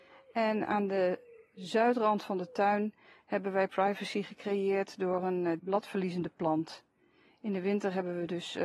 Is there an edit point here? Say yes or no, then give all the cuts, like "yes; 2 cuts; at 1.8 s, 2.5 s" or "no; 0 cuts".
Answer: yes; 1 cut; at 5.6 s